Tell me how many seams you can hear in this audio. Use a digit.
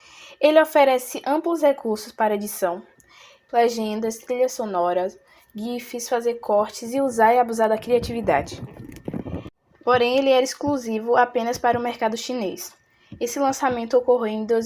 2